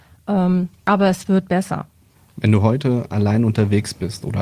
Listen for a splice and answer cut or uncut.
uncut